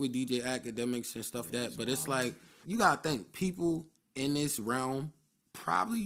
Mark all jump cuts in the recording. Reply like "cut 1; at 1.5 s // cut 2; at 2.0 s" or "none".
cut 1; at 1.5 s // cut 2; at 2.6 s